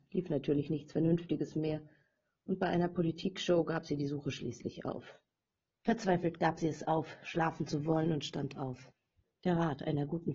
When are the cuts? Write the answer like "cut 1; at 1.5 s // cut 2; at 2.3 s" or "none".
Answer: cut 1; at 5.7 s